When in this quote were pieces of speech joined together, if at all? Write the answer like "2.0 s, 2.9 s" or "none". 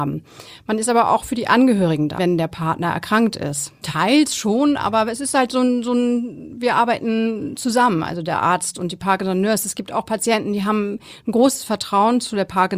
2.2 s, 3.8 s